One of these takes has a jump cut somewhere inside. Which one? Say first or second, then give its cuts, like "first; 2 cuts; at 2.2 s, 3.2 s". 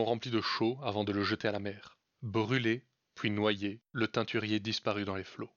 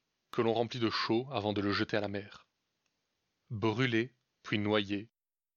first; 2 cuts; at 2.1 s, 3.8 s